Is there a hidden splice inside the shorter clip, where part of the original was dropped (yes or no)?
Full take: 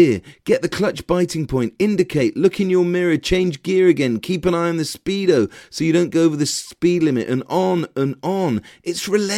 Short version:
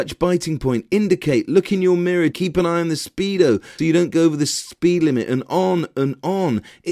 yes